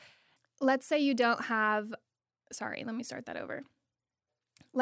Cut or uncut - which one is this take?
uncut